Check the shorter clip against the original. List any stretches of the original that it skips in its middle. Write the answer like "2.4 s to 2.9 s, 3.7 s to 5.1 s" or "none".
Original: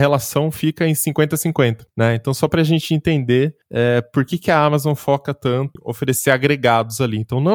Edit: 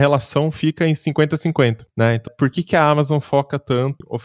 2.3 s to 4.0 s